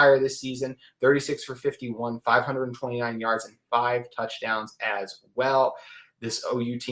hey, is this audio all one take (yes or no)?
yes